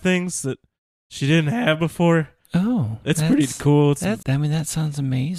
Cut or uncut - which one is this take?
cut